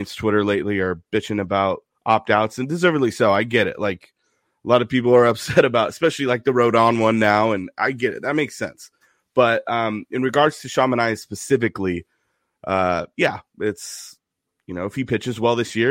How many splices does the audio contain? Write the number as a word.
zero